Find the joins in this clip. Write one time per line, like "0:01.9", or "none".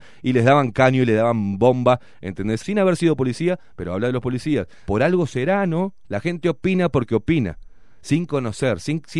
0:02.6
0:04.9
0:06.0